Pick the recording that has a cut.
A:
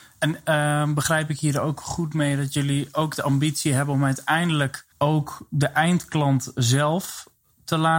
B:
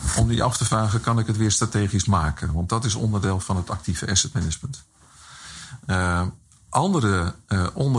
A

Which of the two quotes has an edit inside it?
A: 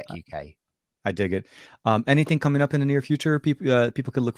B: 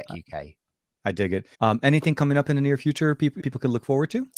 B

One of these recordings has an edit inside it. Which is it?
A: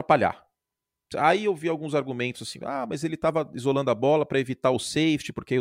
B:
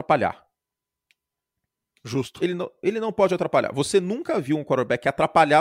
A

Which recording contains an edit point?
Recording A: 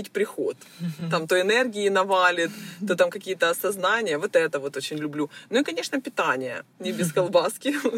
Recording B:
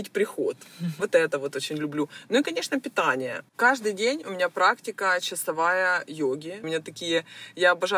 B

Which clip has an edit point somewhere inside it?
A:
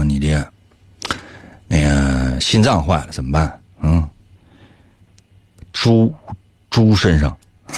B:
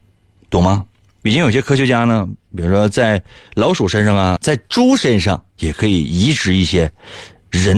B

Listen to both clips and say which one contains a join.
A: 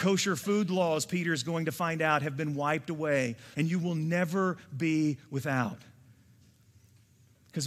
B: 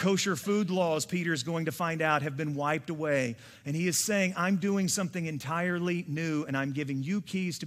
A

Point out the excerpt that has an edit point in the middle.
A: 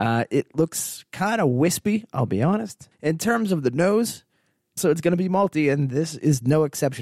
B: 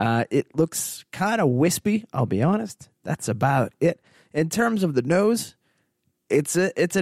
A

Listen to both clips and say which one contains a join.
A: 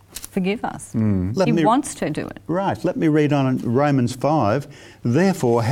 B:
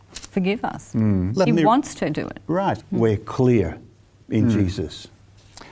B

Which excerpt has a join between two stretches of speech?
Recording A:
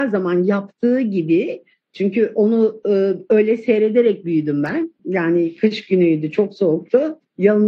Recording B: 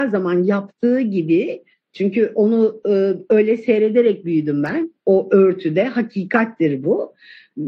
A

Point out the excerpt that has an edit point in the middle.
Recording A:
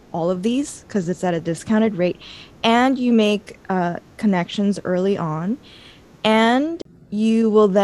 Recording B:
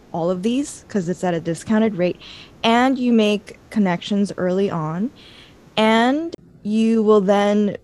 B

